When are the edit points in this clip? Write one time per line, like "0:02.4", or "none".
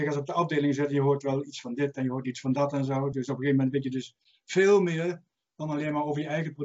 none

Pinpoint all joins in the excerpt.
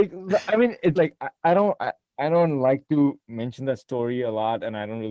0:00.9

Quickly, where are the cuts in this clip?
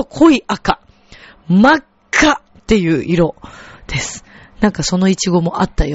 none

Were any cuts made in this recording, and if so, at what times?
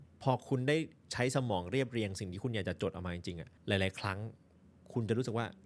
0:03.6

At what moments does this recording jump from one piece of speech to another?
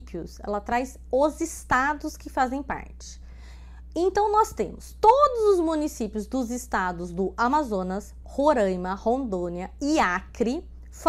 none

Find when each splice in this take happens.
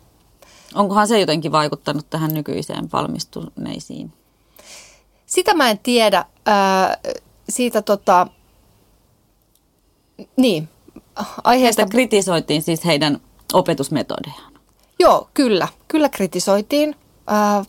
none

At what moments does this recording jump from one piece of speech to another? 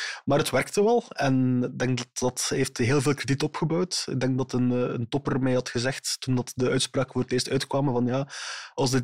none

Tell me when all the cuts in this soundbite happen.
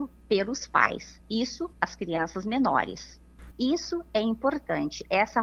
0:01.7
0:03.5

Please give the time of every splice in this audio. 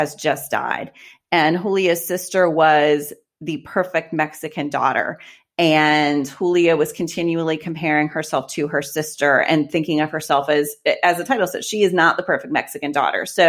none

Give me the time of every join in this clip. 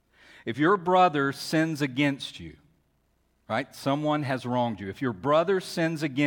none

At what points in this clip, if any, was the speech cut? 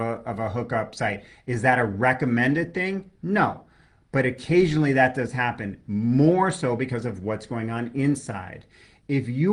none

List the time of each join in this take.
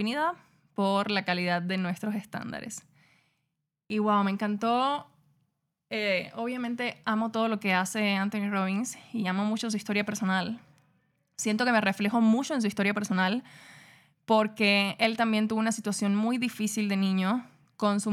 none

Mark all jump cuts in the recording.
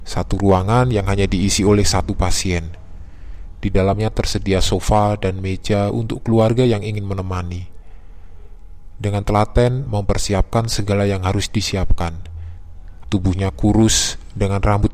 0:09.9
0:13.0

